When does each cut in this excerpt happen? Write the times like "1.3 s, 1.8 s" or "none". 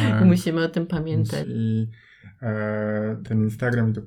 1.4 s